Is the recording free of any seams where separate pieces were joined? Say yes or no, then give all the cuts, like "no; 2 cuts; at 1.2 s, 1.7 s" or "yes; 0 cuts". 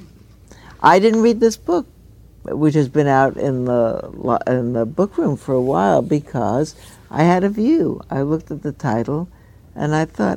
yes; 0 cuts